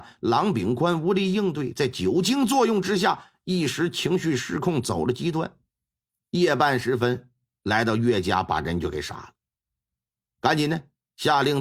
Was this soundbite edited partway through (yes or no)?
no